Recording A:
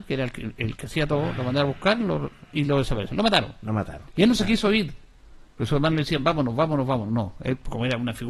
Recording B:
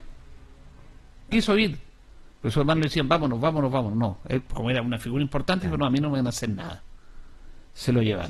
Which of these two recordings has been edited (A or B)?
B